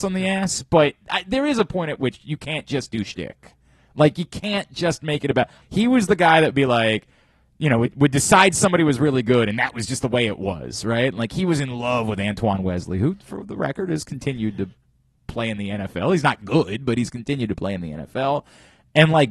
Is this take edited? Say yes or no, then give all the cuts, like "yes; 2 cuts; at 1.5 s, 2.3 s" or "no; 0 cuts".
yes; 1 cut; at 5.6 s